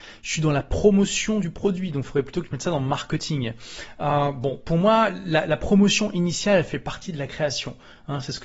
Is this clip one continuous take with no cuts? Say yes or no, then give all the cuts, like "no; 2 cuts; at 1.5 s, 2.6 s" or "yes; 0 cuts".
yes; 0 cuts